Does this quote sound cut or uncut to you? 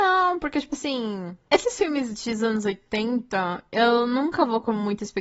uncut